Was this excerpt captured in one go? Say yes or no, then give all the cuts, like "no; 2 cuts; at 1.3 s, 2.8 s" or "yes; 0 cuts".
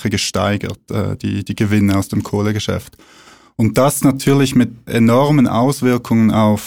no; 1 cut; at 4.9 s